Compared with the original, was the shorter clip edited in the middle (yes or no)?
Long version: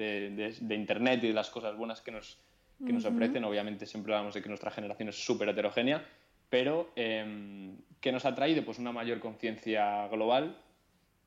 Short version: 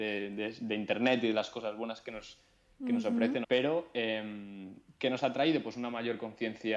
yes